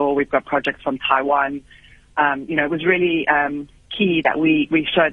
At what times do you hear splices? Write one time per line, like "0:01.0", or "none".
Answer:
none